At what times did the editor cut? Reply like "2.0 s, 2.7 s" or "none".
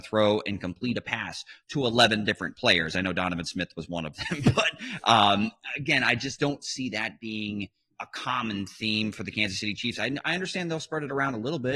7.9 s

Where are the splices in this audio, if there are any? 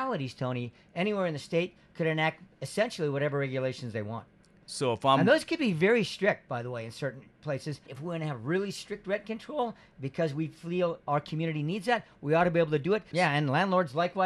7.9 s, 13.1 s

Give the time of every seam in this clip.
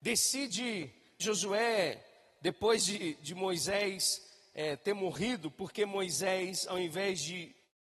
1.2 s

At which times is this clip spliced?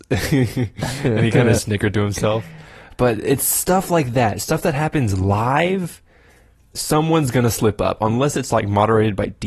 none

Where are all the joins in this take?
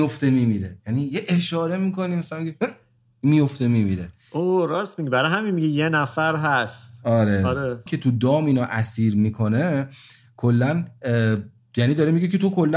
7.9 s

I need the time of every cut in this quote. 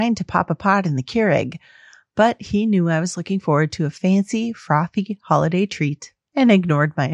none

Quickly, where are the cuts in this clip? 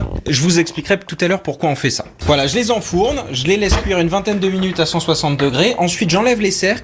2.2 s

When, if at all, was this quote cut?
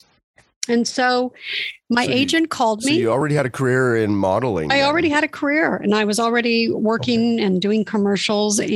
none

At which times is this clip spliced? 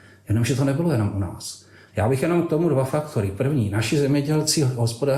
1.9 s

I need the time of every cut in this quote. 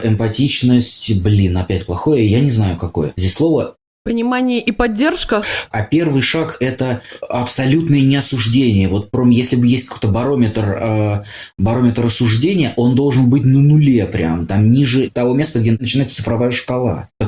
5.7 s

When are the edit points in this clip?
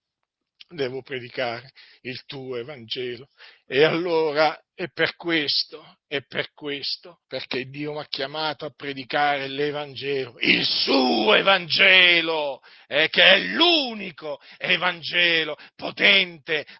7.2 s

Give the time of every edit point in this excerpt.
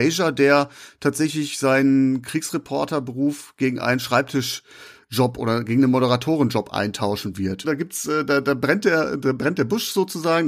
7.6 s

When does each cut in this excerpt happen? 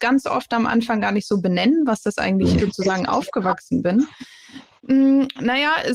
2.6 s, 4.8 s

